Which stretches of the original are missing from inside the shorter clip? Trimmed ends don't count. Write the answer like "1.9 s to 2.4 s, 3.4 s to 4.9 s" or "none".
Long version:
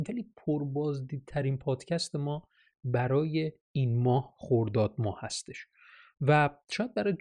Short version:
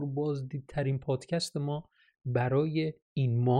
none